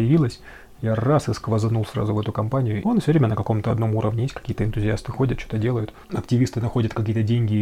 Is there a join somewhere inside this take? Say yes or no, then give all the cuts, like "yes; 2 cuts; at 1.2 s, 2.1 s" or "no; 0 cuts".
yes; 1 cut; at 2.8 s